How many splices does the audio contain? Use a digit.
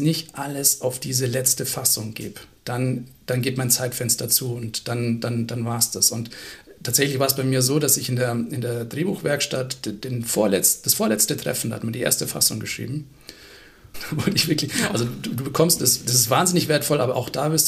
2